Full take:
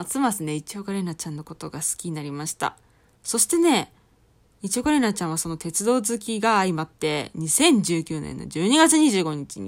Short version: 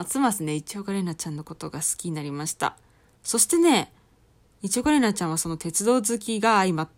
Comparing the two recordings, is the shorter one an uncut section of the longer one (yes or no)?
yes